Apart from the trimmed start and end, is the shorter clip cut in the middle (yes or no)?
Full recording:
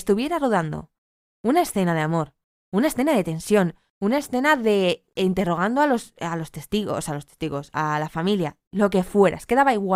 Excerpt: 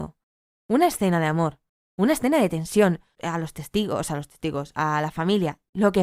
yes